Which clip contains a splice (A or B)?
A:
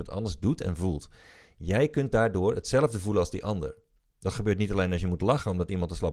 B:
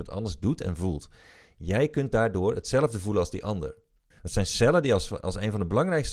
B